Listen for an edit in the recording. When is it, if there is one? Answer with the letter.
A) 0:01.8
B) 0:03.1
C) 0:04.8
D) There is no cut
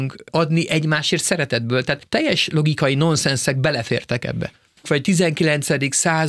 C